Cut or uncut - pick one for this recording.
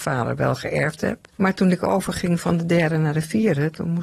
cut